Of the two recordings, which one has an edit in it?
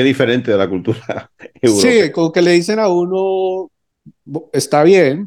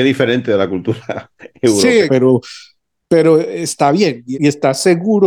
second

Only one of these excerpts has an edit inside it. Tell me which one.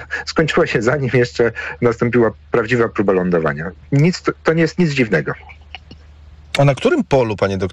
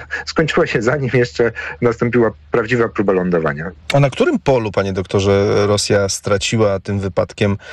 second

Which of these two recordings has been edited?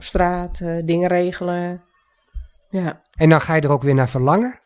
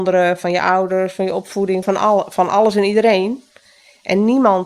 second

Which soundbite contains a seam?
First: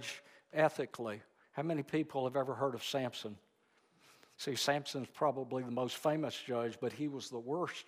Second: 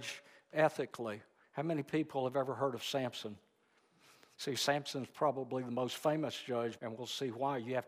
second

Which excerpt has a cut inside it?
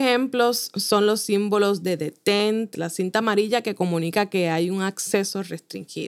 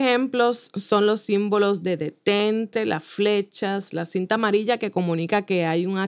first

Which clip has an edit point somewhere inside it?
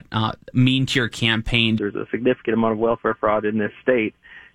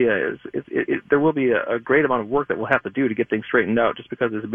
first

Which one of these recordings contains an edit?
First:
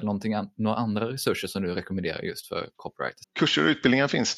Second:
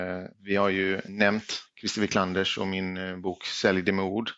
first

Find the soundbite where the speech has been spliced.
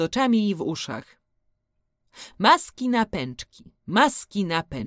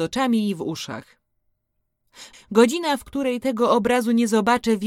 second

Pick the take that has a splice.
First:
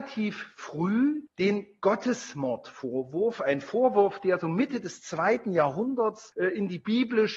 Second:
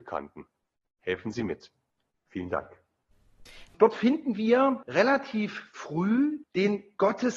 second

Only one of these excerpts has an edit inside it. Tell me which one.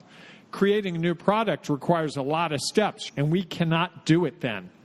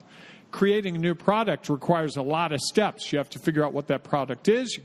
first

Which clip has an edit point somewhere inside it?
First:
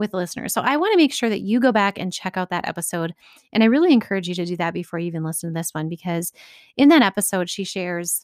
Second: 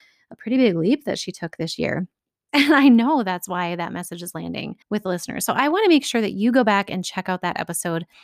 second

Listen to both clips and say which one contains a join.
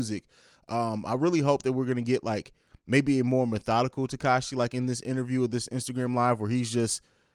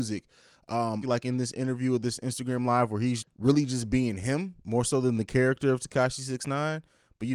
second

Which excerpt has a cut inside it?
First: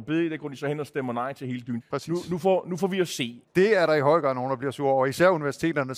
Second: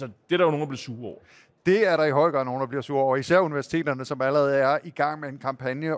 first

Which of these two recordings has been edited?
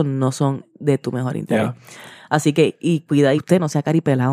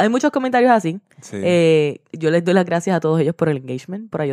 first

